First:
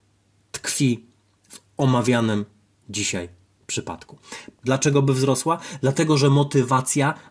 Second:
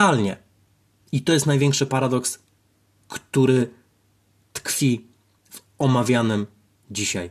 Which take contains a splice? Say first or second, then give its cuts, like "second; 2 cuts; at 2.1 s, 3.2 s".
first; 1 cut; at 4.6 s